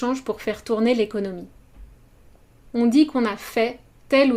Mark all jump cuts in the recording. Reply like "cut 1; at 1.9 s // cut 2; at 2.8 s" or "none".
cut 1; at 2.7 s